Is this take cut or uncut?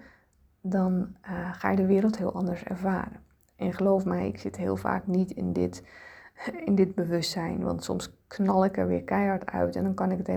uncut